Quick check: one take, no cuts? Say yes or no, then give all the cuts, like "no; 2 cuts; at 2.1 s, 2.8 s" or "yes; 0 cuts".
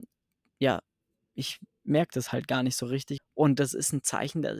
no; 1 cut; at 3.2 s